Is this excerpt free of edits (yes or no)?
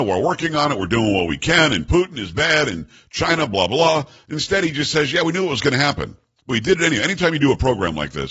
yes